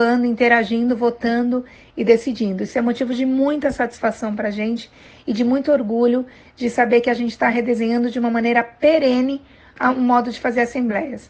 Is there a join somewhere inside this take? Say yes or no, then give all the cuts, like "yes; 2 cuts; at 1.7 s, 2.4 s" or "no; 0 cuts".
no; 0 cuts